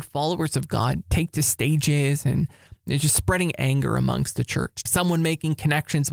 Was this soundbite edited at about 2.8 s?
no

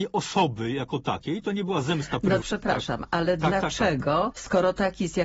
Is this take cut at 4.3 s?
yes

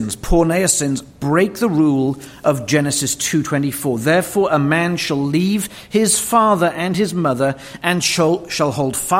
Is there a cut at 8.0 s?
no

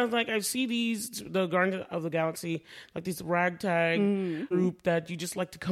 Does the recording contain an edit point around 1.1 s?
no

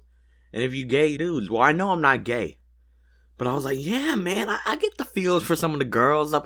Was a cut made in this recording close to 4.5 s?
no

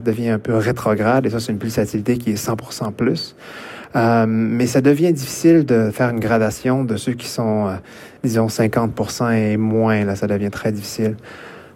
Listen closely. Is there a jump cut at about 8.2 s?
yes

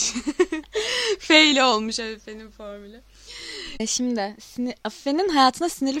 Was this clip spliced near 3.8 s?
no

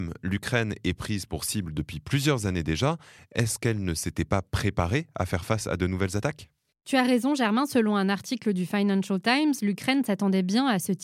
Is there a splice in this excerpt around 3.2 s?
no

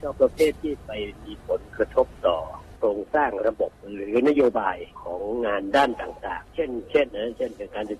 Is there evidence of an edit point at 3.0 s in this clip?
no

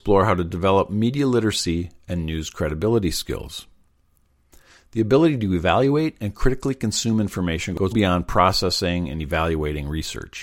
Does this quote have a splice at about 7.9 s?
yes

